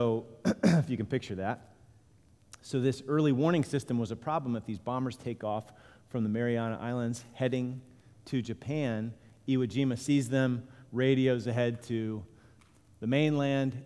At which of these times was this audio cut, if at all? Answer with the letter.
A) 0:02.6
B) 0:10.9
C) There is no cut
C